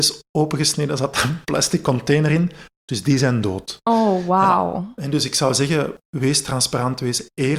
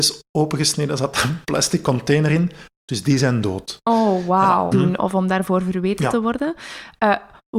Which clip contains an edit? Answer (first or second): second